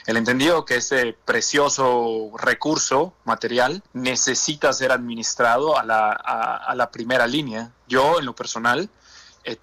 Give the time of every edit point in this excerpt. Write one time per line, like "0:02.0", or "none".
0:03.9